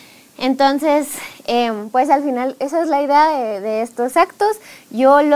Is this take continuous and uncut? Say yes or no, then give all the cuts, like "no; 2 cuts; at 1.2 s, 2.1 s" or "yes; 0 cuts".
yes; 0 cuts